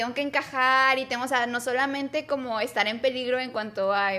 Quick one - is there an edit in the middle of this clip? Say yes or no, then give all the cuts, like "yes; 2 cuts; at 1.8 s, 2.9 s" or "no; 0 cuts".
no; 0 cuts